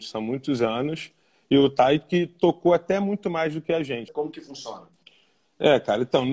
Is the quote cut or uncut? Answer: cut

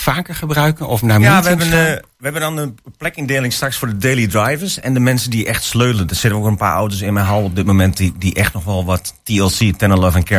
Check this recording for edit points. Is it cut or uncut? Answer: uncut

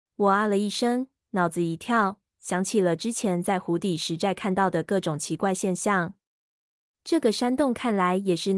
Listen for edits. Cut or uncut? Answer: uncut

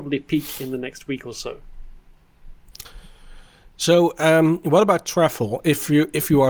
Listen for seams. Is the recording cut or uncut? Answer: uncut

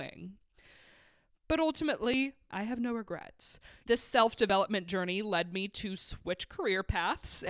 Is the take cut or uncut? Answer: cut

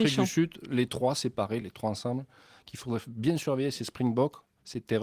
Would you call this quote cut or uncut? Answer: uncut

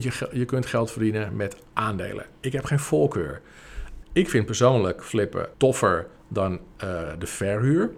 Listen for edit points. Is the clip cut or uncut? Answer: cut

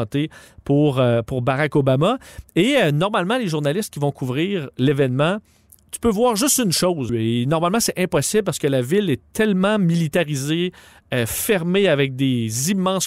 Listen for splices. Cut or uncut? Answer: cut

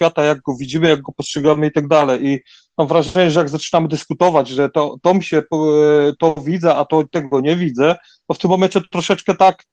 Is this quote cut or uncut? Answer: uncut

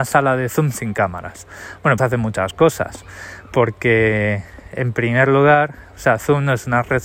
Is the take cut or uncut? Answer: cut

